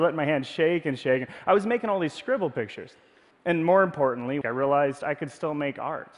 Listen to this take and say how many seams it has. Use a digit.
2